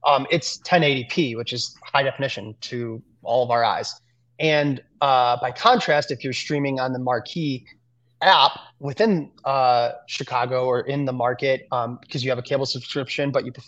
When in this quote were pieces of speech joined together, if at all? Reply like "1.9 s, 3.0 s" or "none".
none